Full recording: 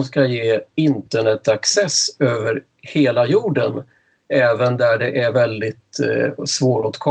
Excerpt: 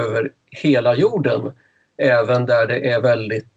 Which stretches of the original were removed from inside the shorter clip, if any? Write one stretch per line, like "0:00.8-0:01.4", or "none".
none